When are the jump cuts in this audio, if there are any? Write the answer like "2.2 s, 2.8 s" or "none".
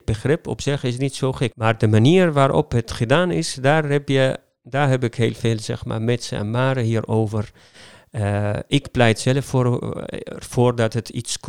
1.5 s